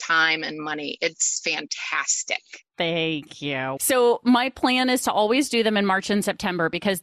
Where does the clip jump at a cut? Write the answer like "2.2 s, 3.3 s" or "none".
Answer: 3.8 s